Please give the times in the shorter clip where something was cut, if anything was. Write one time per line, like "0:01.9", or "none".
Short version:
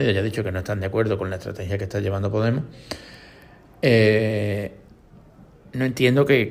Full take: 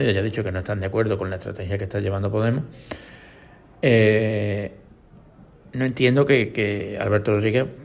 none